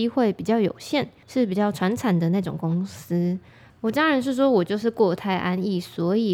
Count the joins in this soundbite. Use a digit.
1